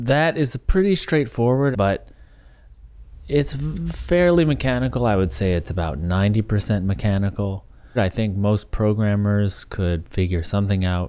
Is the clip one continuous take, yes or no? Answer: no